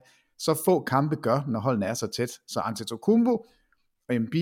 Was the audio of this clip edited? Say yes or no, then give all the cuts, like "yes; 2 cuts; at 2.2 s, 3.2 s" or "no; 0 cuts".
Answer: no; 0 cuts